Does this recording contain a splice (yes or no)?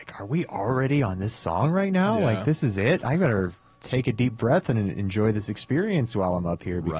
no